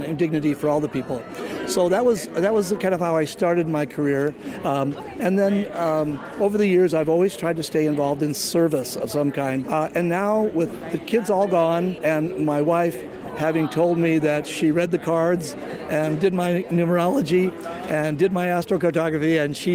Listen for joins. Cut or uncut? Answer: cut